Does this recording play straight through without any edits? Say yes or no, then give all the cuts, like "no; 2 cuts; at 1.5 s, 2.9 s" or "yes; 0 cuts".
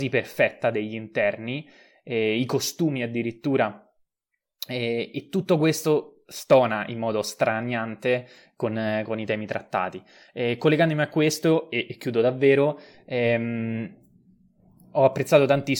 yes; 0 cuts